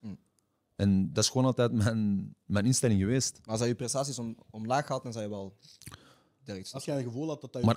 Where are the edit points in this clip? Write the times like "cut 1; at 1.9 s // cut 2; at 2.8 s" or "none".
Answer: none